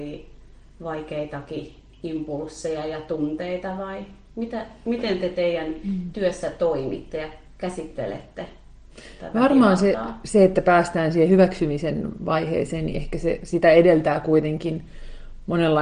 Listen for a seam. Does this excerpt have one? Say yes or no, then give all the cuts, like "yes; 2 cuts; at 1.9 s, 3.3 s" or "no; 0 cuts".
no; 0 cuts